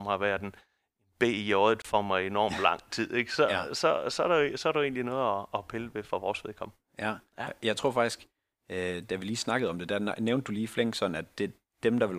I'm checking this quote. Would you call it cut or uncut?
uncut